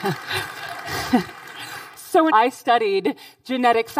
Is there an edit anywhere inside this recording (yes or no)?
yes